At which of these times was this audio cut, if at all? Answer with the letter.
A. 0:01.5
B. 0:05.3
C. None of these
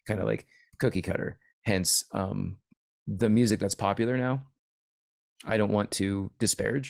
A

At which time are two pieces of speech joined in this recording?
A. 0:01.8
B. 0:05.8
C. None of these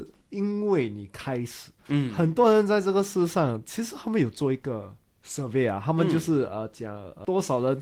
A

